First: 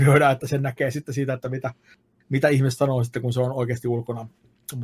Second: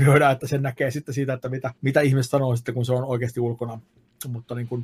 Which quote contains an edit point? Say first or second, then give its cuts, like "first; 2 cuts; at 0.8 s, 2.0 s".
second; 1 cut; at 1.8 s